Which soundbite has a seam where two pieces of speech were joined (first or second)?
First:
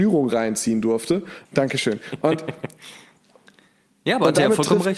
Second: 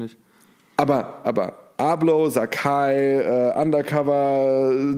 first